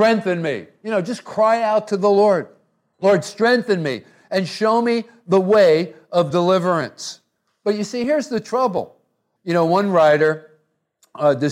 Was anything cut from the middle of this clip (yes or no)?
yes